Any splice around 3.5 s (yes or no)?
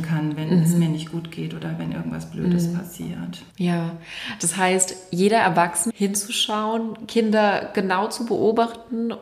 yes